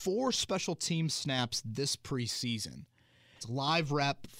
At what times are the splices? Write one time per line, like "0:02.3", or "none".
0:03.4